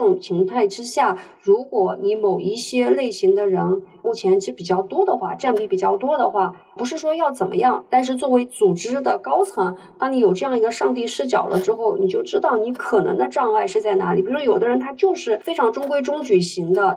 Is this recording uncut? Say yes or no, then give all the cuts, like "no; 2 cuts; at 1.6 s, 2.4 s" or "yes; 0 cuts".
yes; 0 cuts